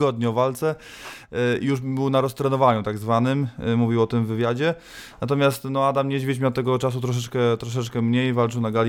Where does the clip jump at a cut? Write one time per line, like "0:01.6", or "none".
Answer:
none

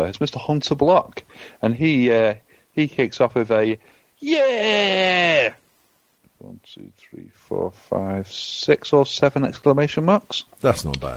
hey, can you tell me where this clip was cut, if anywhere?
none

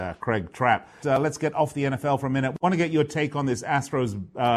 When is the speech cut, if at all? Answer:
0:01.0

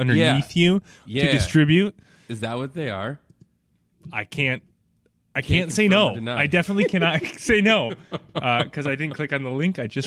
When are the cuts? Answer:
none

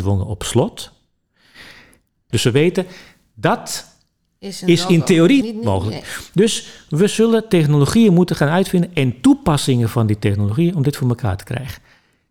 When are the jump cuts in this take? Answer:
0:02.3
0:05.4

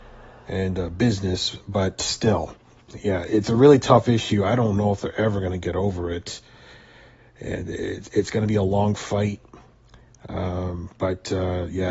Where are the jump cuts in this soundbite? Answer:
0:03.3

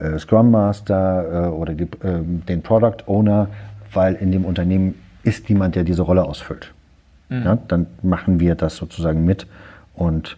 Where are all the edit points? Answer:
none

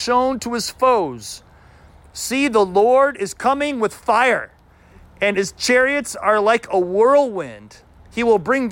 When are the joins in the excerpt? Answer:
none

